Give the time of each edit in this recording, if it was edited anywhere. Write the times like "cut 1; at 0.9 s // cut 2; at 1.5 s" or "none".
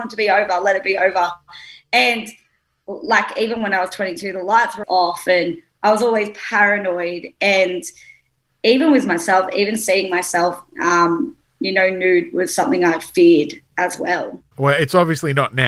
cut 1; at 4.8 s